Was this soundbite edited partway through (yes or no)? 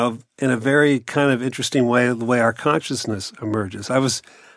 no